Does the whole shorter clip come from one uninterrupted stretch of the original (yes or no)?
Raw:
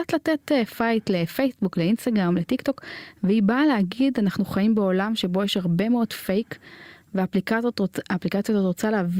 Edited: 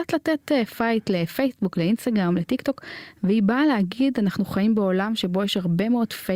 yes